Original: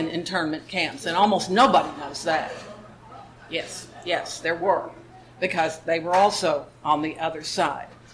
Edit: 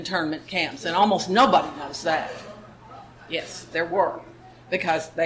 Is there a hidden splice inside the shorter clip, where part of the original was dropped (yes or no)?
yes